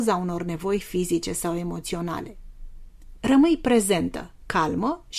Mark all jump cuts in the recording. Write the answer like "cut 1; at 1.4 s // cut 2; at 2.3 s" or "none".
cut 1; at 3.2 s